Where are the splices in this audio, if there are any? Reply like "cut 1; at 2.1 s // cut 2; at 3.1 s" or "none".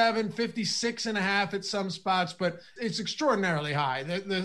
cut 1; at 2.8 s